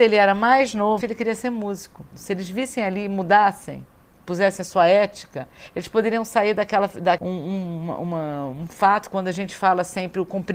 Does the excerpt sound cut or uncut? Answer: cut